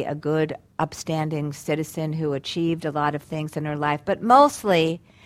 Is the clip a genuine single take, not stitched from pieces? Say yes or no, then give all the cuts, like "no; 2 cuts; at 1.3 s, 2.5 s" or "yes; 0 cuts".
yes; 0 cuts